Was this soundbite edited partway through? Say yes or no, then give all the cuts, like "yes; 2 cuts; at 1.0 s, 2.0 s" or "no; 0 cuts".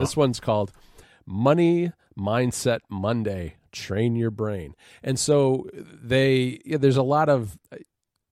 no; 0 cuts